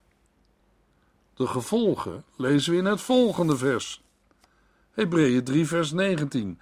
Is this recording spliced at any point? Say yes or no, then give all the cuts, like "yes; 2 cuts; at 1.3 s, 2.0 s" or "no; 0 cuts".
no; 0 cuts